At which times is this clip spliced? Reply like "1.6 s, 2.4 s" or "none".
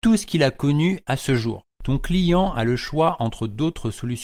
1.7 s